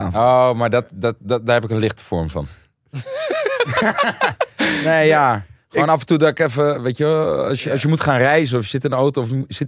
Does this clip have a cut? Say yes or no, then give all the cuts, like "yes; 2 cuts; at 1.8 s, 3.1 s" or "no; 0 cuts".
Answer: no; 0 cuts